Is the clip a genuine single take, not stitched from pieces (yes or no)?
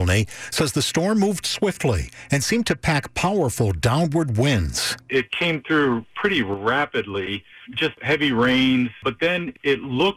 yes